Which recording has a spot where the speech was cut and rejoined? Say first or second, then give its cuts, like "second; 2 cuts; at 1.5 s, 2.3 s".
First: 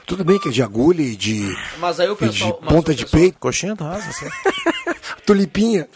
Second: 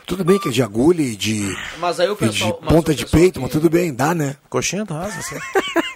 first; 1 cut; at 3.3 s